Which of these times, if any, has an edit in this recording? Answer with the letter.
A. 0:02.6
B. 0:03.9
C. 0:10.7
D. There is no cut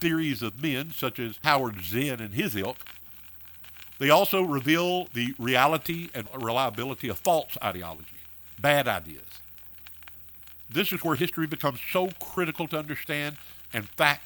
B